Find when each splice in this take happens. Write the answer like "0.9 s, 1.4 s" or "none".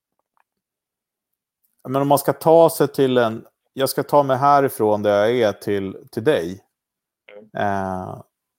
7.5 s